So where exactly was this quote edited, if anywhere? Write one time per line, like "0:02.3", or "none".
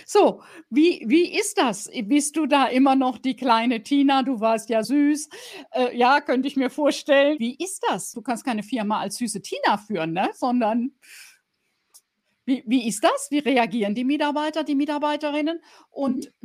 0:04.8